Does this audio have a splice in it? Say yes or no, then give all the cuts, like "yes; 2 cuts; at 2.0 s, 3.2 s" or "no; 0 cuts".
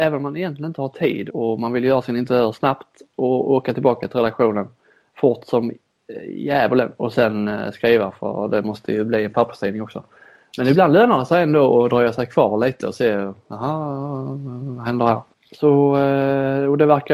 yes; 2 cuts; at 1.3 s, 15.3 s